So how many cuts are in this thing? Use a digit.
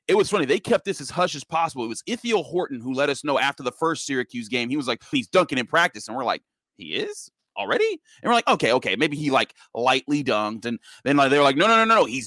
1